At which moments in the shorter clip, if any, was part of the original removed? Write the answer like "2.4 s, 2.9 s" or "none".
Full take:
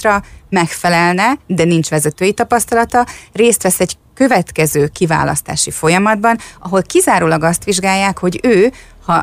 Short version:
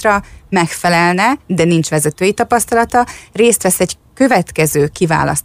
none